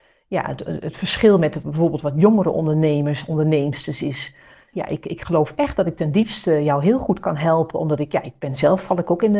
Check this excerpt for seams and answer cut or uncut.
cut